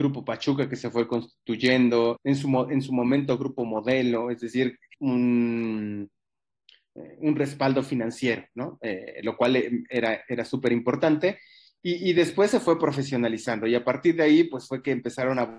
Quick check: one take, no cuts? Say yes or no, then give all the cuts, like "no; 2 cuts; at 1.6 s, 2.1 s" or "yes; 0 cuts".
no; 2 cuts; at 2.2 s, 4.9 s